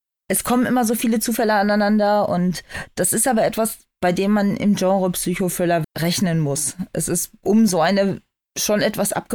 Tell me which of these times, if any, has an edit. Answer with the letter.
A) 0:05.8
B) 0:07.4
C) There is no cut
A